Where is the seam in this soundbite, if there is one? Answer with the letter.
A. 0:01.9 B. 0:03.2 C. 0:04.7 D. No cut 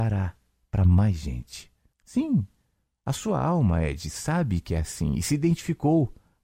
A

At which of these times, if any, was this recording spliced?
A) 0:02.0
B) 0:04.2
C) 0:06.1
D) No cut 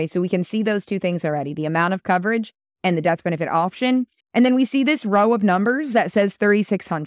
B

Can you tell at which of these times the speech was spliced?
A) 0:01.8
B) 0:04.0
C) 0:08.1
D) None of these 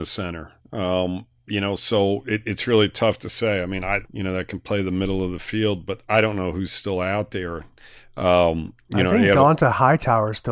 B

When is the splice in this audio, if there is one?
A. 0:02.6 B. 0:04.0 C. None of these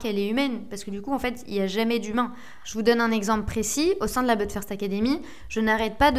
A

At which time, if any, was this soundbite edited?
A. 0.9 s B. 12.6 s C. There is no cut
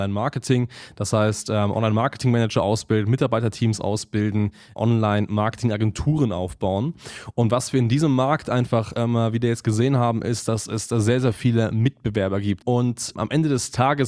B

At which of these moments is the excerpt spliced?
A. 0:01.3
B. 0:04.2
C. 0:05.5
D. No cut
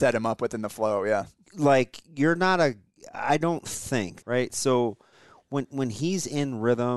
B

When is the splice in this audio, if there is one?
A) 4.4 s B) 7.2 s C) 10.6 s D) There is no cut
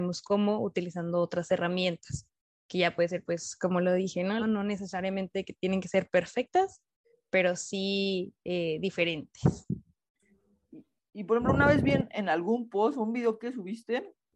A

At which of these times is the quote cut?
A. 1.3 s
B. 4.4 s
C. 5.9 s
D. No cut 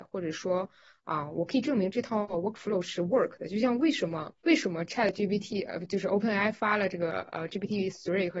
B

